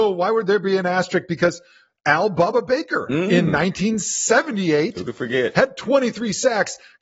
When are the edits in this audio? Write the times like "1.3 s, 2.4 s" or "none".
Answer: none